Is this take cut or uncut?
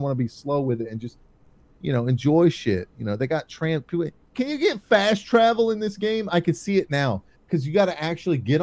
uncut